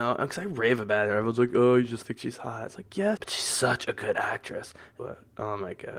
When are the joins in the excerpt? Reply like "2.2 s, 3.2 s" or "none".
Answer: 3.2 s, 5.0 s